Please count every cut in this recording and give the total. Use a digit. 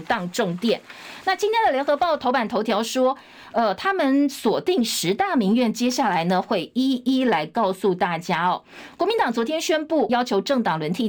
1